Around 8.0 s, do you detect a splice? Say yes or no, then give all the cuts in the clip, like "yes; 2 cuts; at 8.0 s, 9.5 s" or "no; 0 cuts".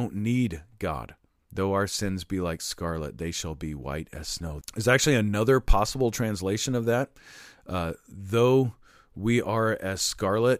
no; 2 cuts; at 1.4 s, 4.6 s